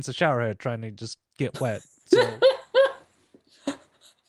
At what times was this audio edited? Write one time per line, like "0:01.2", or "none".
none